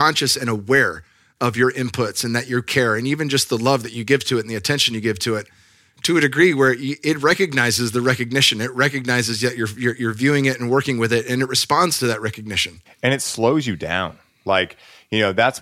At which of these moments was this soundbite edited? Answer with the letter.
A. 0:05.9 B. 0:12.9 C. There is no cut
B